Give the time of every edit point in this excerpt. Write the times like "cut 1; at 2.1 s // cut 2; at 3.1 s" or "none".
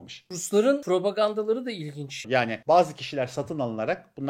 cut 1; at 2.2 s